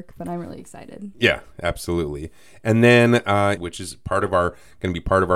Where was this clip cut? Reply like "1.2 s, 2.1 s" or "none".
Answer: 3.6 s